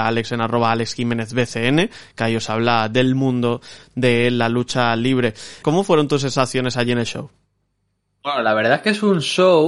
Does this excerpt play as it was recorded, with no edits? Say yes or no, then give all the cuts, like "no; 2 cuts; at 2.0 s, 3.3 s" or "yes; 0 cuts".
no; 1 cut; at 5.6 s